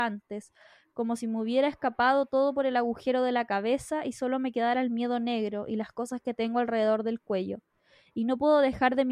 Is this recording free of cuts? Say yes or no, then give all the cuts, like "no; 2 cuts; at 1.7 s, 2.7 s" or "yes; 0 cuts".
yes; 0 cuts